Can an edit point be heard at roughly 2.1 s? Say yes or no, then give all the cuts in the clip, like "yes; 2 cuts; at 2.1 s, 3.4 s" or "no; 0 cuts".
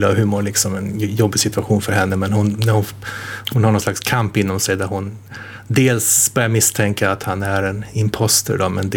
no; 1 cut; at 3.5 s